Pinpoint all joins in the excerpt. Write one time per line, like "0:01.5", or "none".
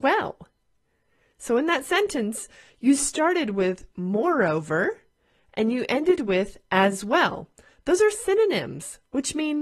none